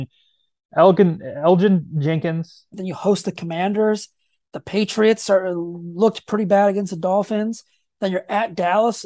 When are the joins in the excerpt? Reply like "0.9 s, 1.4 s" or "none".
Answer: 2.7 s

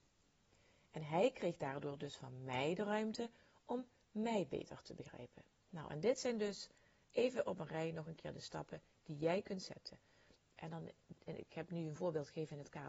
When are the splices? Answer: 5.5 s, 10.4 s

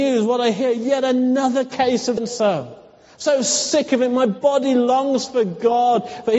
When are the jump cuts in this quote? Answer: 2.2 s

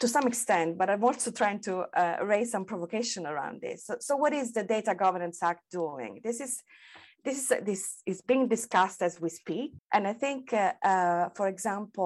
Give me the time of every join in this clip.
9.8 s

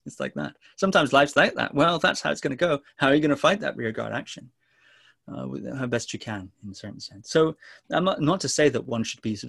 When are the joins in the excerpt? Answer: none

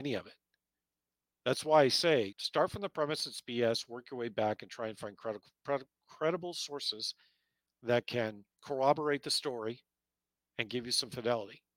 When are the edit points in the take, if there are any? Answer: 2.3 s, 8.5 s

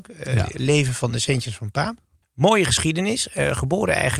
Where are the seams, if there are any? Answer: 2.2 s

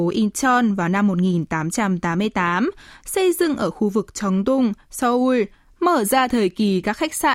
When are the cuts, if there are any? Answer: 3.0 s, 5.7 s

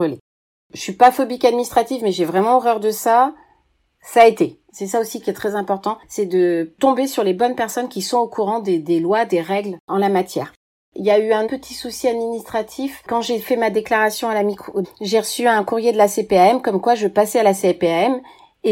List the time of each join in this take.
4.7 s, 14.8 s

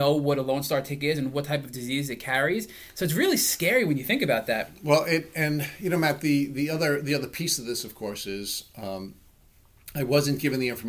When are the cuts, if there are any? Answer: none

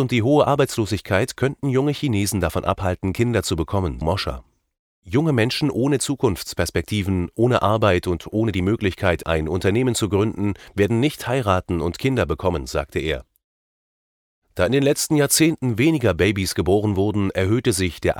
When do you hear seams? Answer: 4.0 s

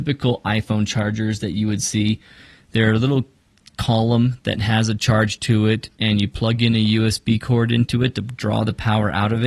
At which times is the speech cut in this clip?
none

